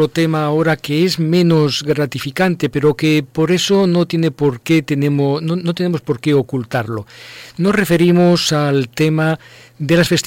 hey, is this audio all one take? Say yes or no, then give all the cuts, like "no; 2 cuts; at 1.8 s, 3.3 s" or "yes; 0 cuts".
yes; 0 cuts